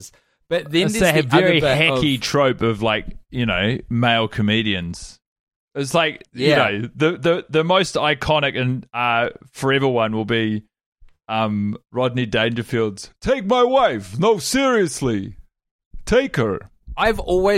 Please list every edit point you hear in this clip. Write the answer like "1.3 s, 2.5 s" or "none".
none